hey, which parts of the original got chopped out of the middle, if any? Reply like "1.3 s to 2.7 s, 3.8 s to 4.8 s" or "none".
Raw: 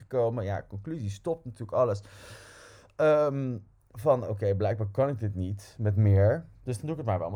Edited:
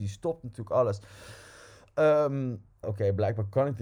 3.8 s to 4.2 s